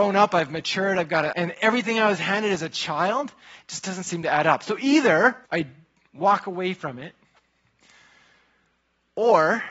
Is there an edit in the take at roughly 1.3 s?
yes; 2 cuts; at 1.3 s, 5.4 s

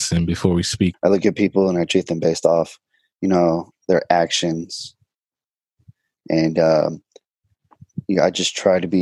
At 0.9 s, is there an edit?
yes; 1 cut; at 0.9 s

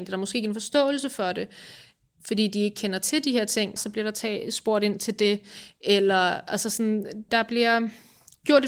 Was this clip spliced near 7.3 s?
yes; 2 cuts; at 3.8 s, 7.3 s

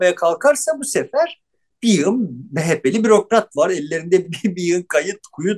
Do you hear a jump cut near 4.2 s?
no; 0 cuts

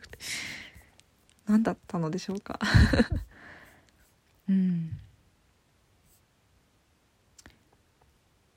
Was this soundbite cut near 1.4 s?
no; 1 cut; at 4.4 s

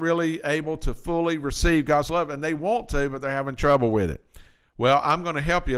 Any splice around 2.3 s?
no; 0 cuts

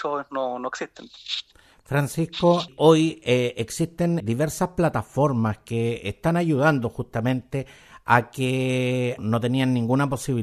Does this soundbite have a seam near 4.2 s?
yes; 2 cuts; at 4.2 s, 9.2 s

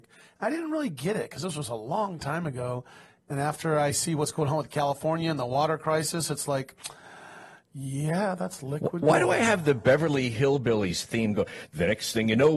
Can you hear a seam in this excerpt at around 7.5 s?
no; 0 cuts

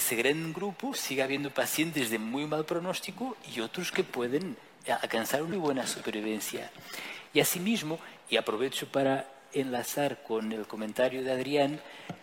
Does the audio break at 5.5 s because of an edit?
yes; 2 cuts; at 5.5 s, 7.3 s

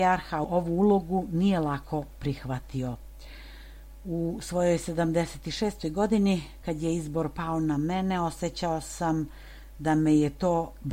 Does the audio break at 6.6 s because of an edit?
no; 0 cuts

